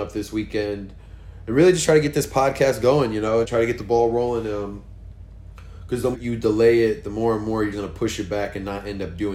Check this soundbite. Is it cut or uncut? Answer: cut